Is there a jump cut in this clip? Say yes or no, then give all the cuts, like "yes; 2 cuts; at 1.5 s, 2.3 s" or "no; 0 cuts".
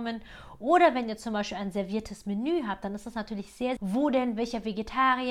yes; 1 cut; at 3.8 s